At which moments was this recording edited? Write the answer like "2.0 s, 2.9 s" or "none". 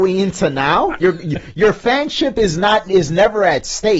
1.0 s

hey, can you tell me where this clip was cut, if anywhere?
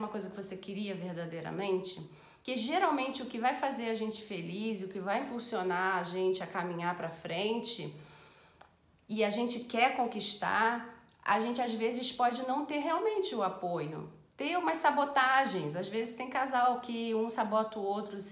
none

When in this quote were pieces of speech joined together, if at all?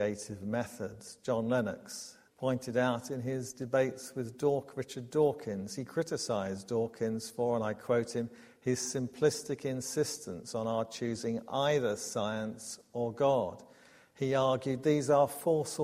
2.3 s

